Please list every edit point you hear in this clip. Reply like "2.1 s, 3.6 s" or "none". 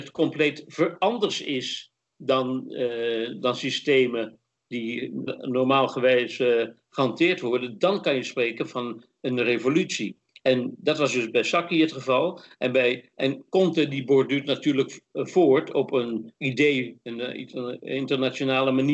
5.3 s, 16.4 s